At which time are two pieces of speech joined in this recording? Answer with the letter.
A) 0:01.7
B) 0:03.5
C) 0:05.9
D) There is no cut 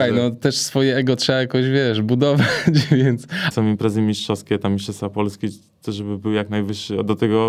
B